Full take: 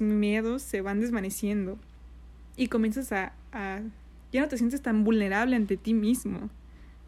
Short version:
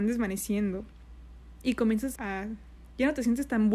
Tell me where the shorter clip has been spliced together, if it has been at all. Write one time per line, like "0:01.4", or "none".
0:02.2